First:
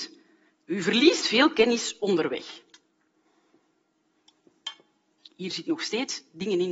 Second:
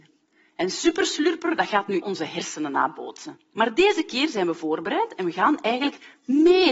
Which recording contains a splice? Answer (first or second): second